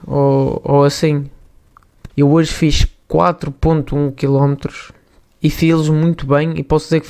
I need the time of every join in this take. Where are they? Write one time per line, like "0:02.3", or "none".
0:02.1